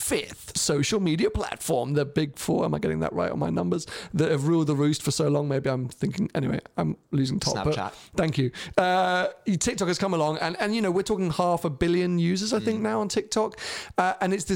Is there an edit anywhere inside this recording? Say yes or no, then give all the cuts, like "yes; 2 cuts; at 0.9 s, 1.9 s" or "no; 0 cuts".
no; 0 cuts